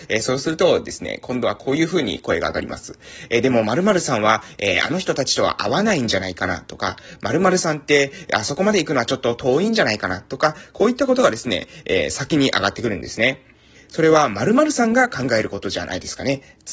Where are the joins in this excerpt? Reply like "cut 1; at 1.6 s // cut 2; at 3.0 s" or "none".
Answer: cut 1; at 13.7 s